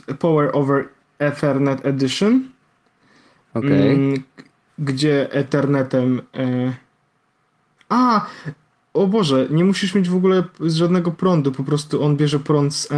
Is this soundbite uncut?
yes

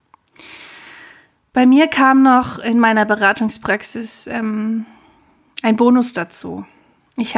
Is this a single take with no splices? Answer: yes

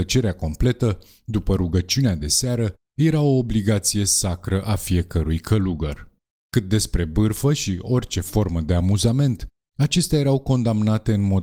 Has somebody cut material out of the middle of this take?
no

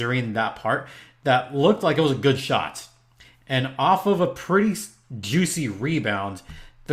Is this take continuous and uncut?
yes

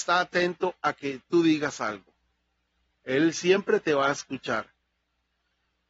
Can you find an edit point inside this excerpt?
no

